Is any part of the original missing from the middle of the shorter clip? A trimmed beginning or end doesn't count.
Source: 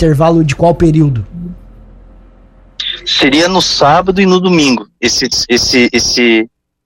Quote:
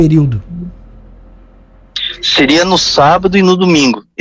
no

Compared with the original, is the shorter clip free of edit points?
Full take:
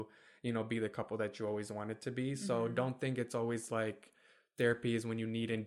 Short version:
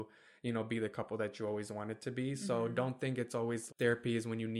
no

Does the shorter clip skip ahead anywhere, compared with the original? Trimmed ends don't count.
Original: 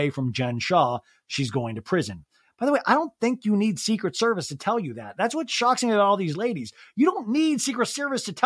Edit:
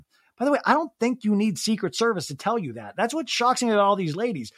no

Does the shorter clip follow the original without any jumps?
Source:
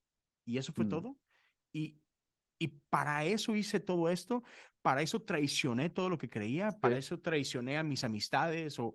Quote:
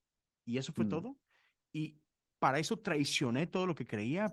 no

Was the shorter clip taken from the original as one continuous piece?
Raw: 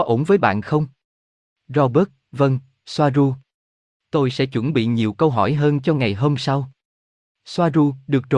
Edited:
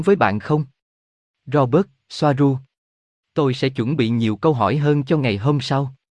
no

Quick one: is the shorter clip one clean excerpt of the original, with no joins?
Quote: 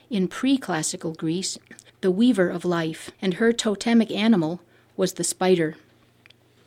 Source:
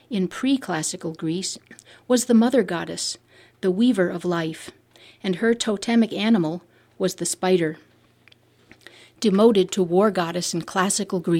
no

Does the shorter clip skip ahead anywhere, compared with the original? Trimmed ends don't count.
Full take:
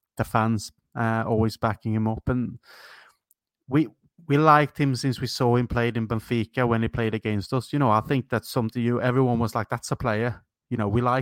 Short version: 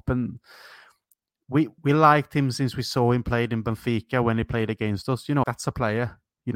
yes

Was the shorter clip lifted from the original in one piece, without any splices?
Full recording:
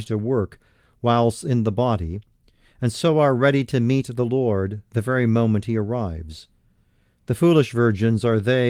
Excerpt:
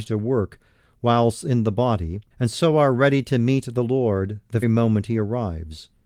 no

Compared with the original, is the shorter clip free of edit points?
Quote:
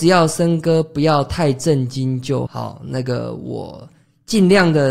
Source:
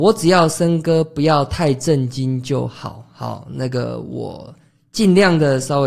no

